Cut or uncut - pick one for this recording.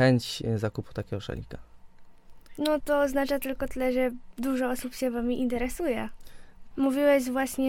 cut